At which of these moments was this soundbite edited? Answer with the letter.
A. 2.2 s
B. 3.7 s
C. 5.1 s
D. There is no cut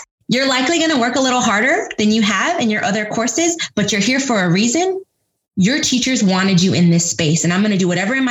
D